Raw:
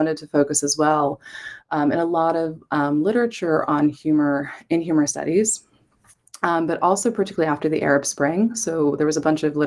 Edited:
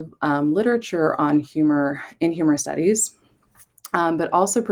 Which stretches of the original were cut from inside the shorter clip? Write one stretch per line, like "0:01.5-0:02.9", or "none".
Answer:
none